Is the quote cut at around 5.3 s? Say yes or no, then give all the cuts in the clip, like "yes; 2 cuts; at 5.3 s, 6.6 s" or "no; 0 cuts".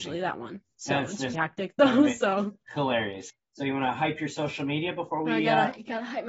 no; 2 cuts; at 1.3 s, 3.3 s